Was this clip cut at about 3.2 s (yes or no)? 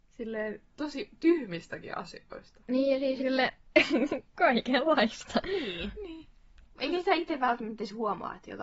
yes